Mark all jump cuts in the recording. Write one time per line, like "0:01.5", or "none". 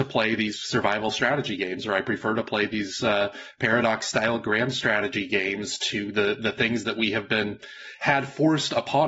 none

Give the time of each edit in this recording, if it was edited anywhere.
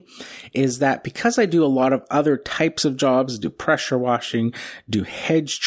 none

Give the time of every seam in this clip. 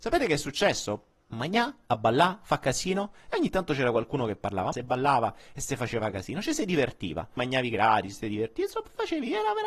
0:01.3
0:04.7
0:07.4

